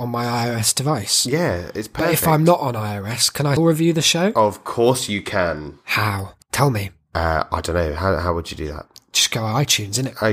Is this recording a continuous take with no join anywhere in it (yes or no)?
no